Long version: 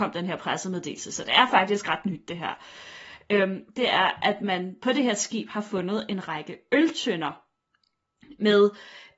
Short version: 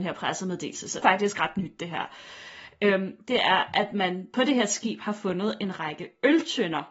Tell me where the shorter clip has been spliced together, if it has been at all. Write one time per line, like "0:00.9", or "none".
0:01.0

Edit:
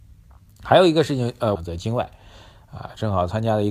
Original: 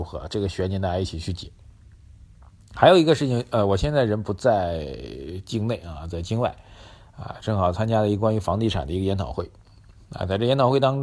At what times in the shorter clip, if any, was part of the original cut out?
0:01.6

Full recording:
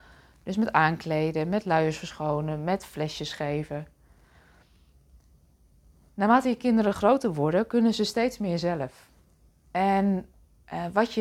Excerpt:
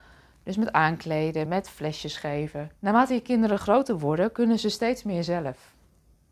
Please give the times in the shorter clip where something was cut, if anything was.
0:01.5
0:02.8

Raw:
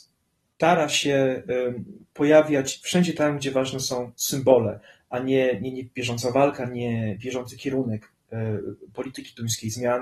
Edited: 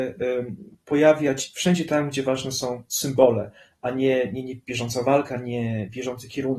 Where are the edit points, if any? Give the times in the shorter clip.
none

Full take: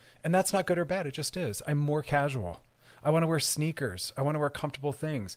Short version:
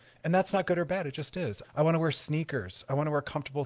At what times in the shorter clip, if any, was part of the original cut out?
0:01.6

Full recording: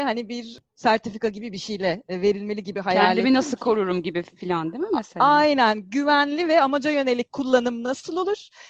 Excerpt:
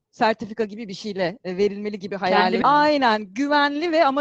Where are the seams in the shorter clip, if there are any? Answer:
0:02.6

